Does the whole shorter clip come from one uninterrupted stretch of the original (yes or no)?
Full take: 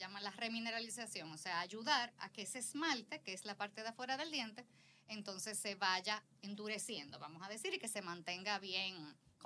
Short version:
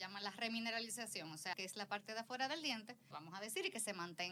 no